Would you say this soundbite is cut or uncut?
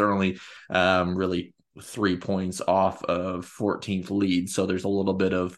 uncut